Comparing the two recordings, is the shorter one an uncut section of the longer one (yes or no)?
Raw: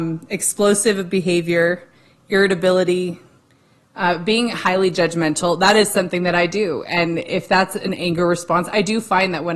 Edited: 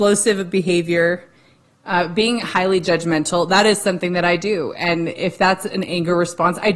no